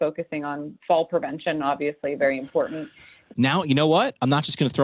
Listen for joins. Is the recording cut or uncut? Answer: cut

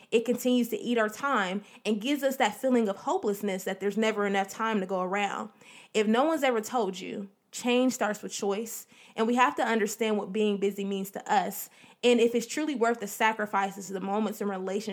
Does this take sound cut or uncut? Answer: uncut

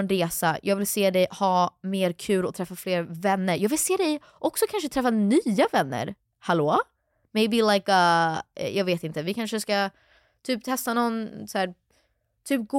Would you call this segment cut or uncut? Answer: uncut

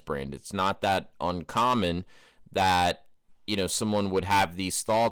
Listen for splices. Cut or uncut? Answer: uncut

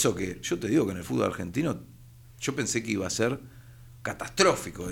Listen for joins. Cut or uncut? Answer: uncut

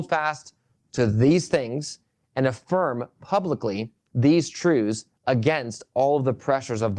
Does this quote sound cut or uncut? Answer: uncut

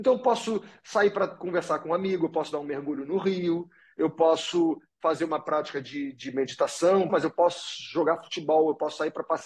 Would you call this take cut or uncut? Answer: cut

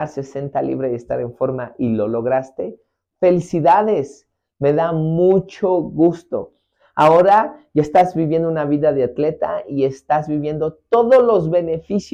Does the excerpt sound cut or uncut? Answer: uncut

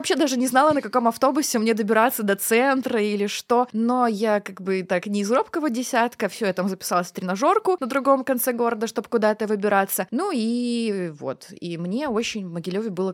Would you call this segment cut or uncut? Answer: uncut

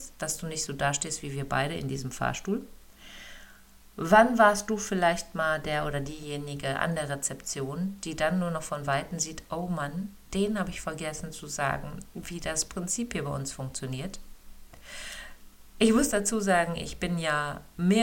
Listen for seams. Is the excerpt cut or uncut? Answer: uncut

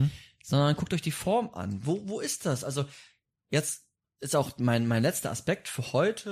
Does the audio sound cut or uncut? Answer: uncut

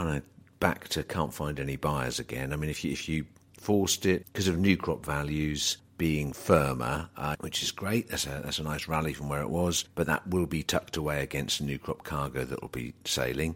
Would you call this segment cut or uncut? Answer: cut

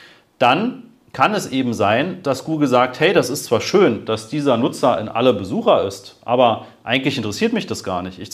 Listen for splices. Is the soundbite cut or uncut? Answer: uncut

